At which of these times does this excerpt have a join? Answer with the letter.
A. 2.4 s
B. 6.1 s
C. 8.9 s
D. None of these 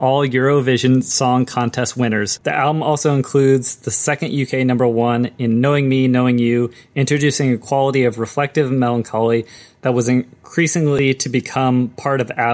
A